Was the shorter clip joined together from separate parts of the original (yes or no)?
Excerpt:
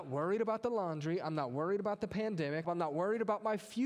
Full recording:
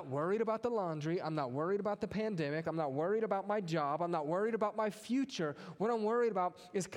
yes